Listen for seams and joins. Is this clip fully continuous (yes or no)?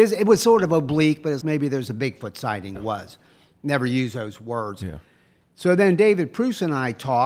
no